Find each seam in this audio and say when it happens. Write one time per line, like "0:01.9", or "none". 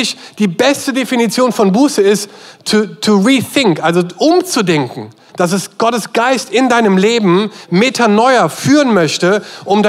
0:05.3
0:07.6

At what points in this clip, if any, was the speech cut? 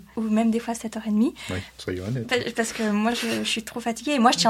none

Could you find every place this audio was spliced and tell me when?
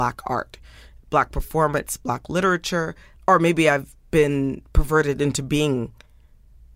0:03.2

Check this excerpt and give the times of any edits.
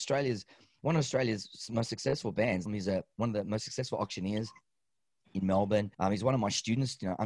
0:02.7
0:05.9

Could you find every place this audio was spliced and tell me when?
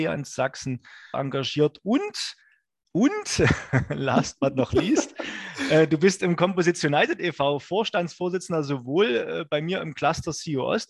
0:01.1

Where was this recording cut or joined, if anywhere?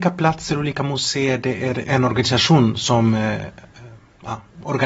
0:01.9

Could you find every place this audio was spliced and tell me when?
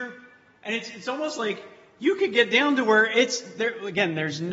none

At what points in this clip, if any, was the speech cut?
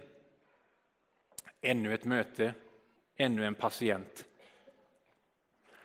0:03.0

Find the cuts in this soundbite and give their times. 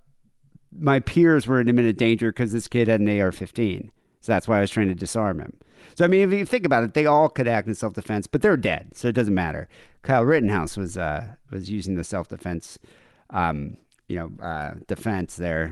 none

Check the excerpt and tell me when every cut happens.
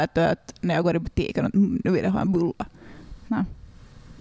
none

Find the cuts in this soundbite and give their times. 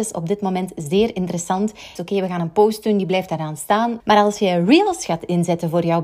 0:02.0
0:04.0

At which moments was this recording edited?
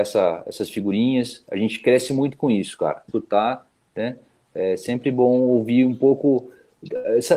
0:03.1

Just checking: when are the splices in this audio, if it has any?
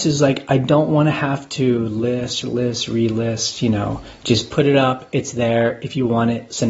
0:02.4

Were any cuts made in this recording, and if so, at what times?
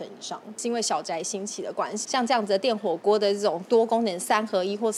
0:02.0

